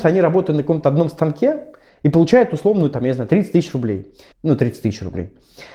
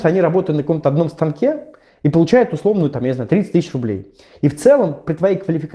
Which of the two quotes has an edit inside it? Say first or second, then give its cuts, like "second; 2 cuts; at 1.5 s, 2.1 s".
first; 1 cut; at 4.3 s